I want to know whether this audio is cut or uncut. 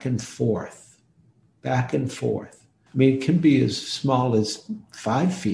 cut